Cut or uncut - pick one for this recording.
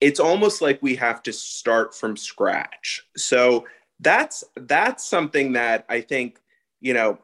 uncut